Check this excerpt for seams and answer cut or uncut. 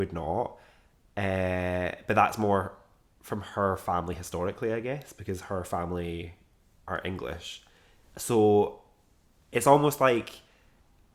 uncut